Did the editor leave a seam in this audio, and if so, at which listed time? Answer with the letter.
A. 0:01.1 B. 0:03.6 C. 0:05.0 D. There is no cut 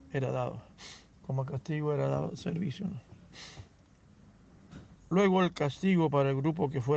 C